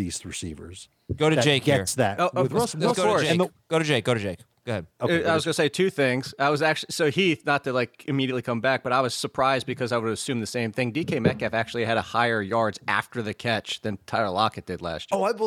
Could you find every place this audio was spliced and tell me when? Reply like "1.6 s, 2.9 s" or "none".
none